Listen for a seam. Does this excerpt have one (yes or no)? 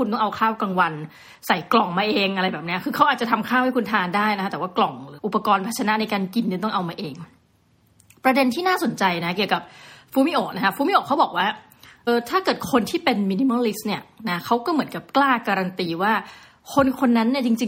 yes